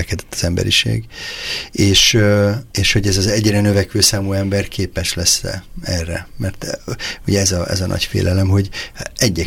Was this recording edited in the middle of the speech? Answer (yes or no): yes